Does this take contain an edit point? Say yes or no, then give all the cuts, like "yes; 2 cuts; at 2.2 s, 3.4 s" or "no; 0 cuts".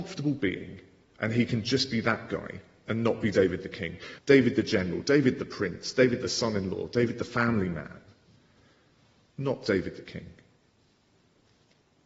yes; 1 cut; at 4.2 s